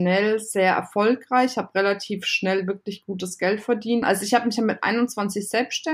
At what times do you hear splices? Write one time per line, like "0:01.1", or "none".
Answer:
0:04.0